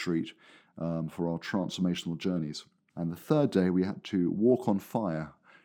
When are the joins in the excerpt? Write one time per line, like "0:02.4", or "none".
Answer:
0:02.9